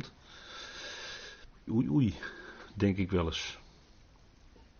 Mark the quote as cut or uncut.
cut